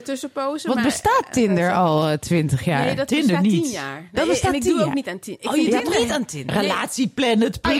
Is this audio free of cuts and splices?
yes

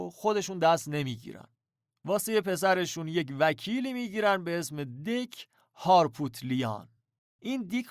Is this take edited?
no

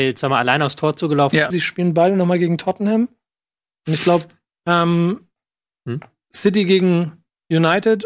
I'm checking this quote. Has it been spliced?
yes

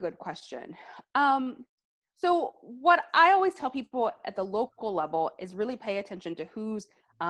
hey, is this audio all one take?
yes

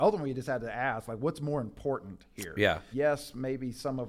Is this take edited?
yes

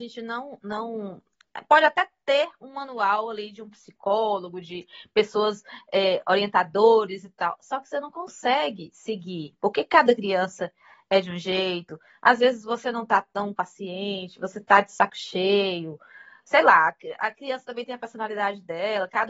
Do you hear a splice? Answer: no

